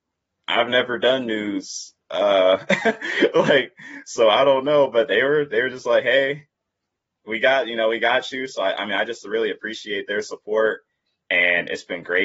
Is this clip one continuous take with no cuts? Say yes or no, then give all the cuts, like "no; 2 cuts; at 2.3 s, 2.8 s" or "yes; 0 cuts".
yes; 0 cuts